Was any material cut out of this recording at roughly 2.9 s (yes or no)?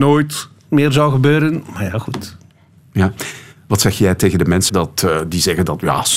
no